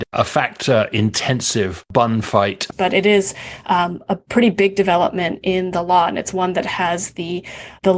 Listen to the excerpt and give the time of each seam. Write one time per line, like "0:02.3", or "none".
0:02.7